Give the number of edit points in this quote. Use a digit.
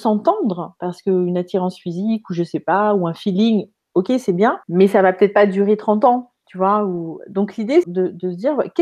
2